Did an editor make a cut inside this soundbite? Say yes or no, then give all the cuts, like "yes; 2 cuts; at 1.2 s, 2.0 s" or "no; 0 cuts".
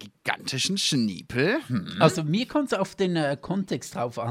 no; 0 cuts